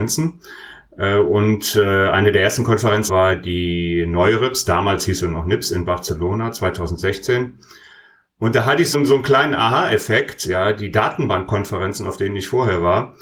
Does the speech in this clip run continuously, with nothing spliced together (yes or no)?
no